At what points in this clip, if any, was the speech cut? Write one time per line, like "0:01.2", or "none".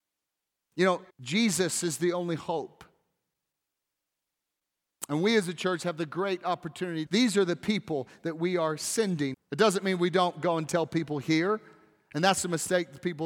0:01.1
0:07.1
0:09.3